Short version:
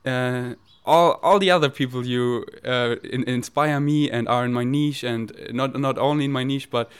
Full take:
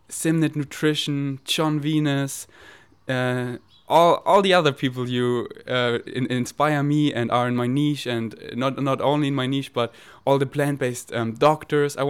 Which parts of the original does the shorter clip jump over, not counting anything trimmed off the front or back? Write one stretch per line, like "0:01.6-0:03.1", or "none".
none

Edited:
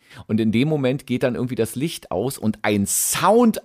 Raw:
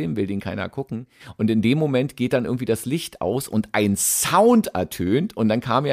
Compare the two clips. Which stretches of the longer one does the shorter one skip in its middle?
none

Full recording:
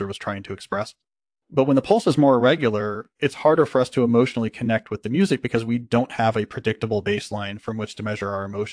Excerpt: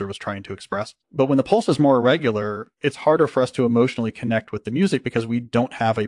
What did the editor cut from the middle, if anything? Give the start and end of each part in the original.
0:01.0-0:01.4

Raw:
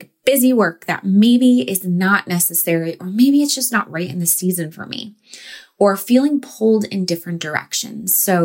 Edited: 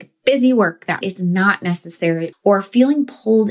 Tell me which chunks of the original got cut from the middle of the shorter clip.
0:01.0-0:01.7
0:03.0-0:05.7

